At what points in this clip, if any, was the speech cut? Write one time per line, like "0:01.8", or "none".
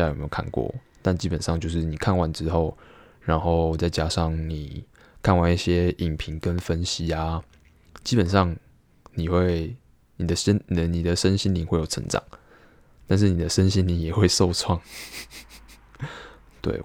none